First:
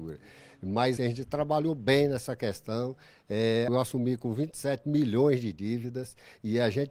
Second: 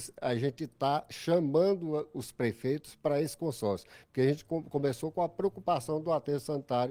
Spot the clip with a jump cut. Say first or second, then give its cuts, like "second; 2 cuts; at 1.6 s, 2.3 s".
first; 2 cuts; at 1.0 s, 3.7 s